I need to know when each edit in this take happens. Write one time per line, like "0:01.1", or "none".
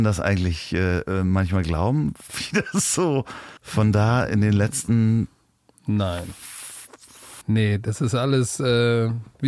0:03.6
0:07.4